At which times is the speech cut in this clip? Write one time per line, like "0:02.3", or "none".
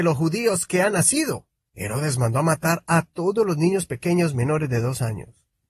none